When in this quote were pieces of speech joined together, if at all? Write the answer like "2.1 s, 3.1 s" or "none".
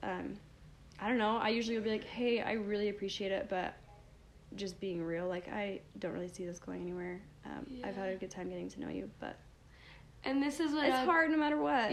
none

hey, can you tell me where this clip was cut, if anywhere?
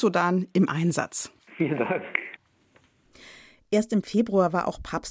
none

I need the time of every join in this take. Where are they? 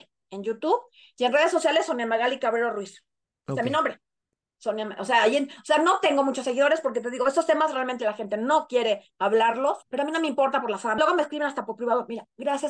9.8 s, 11.0 s

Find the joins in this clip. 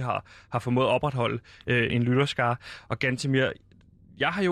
1.9 s

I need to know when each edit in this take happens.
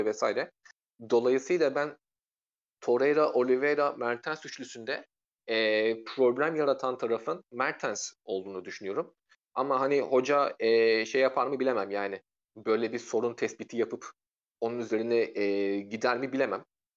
none

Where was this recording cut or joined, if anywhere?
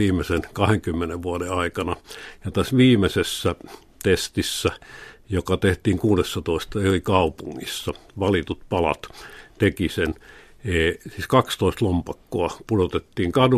none

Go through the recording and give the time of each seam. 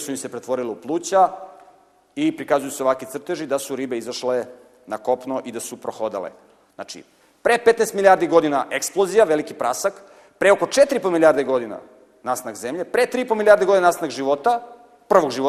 6.6 s

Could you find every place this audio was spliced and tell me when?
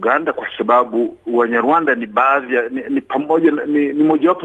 none

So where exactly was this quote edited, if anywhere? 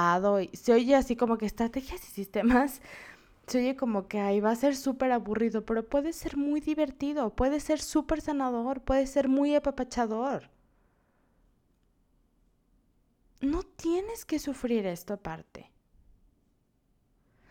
none

